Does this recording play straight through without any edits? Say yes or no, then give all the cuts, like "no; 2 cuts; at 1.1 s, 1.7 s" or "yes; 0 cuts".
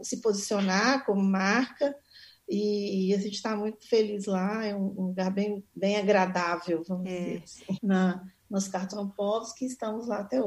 no; 1 cut; at 7.8 s